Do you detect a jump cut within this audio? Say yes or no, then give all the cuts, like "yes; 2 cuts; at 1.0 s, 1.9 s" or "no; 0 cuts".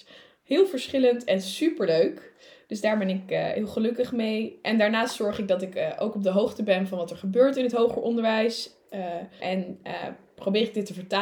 yes; 1 cut; at 9.4 s